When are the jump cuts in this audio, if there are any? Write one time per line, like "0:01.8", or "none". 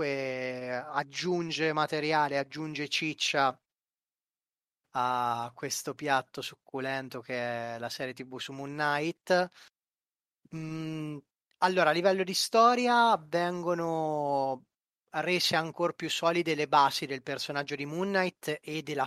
none